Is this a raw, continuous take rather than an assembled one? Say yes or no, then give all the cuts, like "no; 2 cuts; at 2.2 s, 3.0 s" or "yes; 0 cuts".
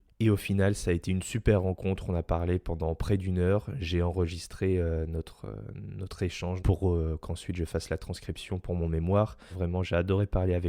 no; 2 cuts; at 6.6 s, 9.5 s